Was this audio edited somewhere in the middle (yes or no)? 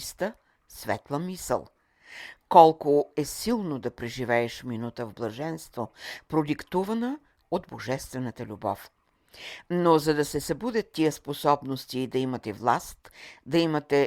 no